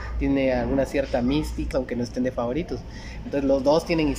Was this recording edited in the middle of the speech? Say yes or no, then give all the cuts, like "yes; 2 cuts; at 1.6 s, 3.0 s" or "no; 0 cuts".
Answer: yes; 2 cuts; at 1.7 s, 3.2 s